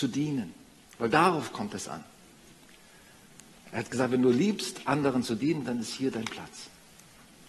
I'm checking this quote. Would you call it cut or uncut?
cut